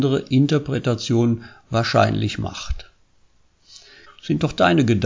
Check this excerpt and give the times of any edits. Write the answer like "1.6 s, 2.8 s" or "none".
4.1 s